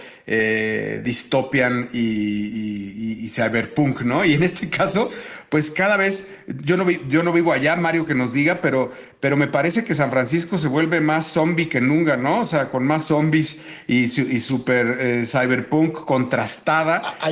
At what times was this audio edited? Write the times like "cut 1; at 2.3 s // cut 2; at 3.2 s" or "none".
none